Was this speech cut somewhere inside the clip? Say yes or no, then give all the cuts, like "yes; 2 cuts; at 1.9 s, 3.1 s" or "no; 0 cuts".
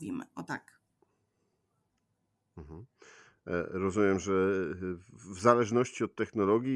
no; 0 cuts